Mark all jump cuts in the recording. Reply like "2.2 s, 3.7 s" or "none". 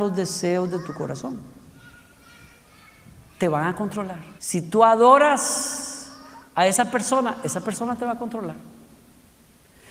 4.4 s, 6.5 s